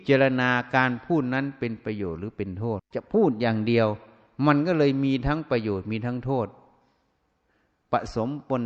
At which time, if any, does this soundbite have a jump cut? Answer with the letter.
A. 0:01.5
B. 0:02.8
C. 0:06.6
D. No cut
B